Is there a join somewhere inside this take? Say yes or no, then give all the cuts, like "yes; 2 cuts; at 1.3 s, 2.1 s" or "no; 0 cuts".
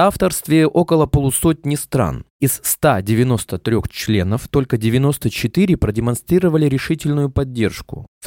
no; 0 cuts